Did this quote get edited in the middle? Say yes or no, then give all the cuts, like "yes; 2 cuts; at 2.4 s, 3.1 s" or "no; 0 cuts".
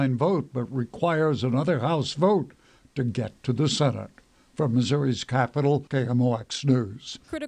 yes; 1 cut; at 5.9 s